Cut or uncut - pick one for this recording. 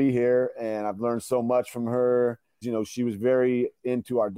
cut